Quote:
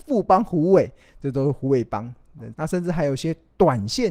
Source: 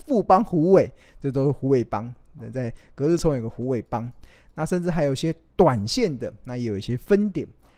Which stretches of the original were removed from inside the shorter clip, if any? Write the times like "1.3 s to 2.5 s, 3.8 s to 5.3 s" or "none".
2.5 s to 4.5 s